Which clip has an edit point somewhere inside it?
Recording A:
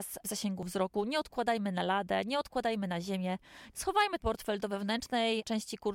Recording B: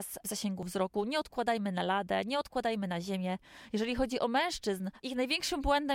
A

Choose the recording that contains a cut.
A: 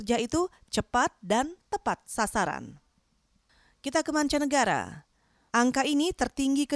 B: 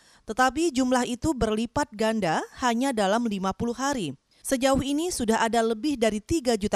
A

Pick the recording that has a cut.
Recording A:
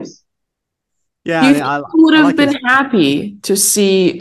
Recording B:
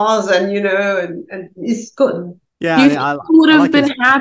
B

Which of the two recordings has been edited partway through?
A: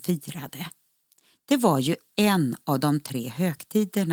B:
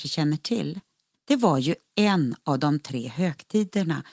B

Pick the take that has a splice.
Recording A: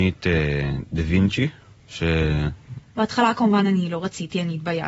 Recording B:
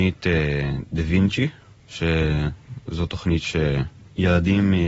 A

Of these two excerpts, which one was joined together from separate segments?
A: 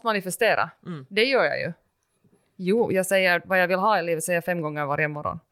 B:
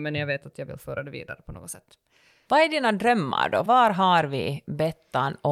B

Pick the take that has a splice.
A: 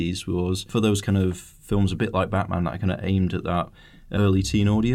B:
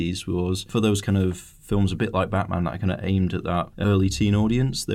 B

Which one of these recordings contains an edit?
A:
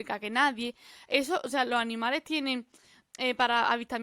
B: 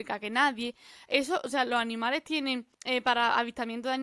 B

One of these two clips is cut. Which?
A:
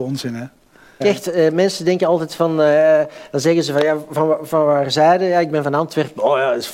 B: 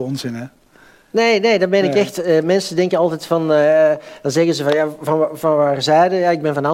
A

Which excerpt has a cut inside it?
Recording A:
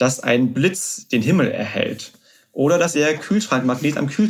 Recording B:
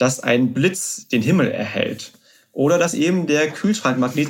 A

